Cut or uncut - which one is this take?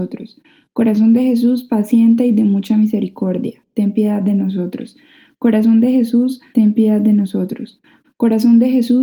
cut